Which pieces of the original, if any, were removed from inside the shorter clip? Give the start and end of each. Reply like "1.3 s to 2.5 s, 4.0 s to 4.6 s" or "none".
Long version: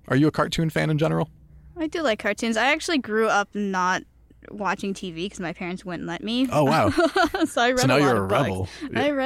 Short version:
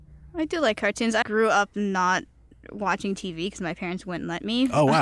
2.6 s to 3.0 s